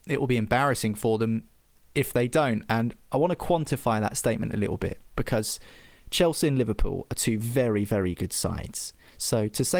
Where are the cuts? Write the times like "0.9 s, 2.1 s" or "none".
none